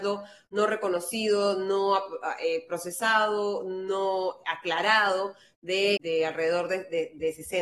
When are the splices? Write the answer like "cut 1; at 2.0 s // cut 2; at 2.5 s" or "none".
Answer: cut 1; at 6.0 s

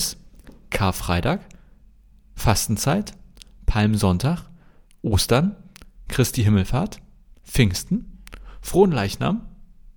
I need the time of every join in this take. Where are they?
cut 1; at 4.8 s

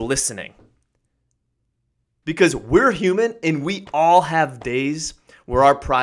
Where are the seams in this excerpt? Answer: cut 1; at 2.2 s

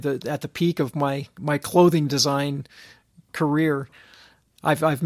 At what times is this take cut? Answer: none

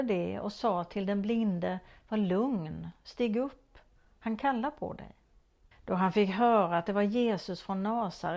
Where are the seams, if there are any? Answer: cut 1; at 5.7 s

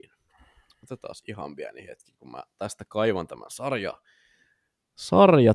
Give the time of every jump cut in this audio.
none

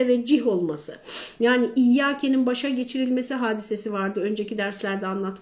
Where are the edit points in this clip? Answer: none

